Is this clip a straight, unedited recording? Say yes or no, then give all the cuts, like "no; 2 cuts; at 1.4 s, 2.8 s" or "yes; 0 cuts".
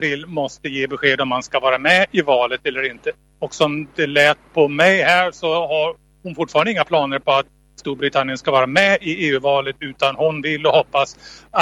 yes; 0 cuts